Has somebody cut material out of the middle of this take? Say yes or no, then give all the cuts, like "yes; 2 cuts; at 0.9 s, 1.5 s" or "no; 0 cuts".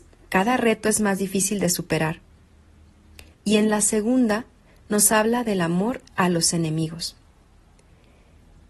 yes; 1 cut; at 3.3 s